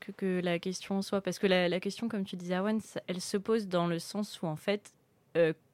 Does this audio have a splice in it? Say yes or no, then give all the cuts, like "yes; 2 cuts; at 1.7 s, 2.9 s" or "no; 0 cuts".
yes; 1 cut; at 3.0 s